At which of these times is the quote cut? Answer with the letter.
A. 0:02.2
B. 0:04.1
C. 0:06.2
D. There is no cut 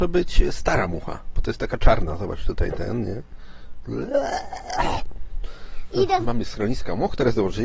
C